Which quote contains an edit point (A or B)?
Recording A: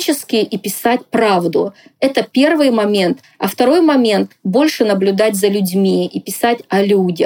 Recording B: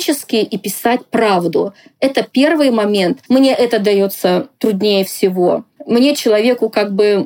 B